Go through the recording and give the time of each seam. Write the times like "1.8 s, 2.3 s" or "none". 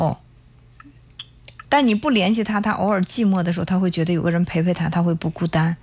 1.7 s